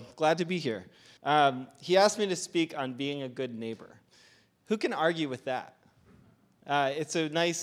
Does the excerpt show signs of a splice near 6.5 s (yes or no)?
no